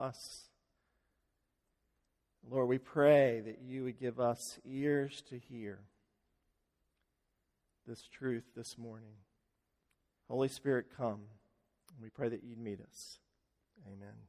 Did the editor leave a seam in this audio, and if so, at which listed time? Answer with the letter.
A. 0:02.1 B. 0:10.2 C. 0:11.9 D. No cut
B